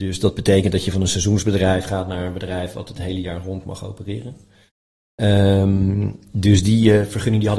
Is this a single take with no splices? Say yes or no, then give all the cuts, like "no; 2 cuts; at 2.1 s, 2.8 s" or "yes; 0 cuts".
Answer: yes; 0 cuts